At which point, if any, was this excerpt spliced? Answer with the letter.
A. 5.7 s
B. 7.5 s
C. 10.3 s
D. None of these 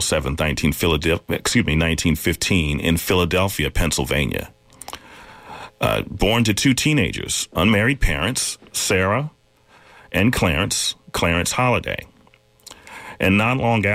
D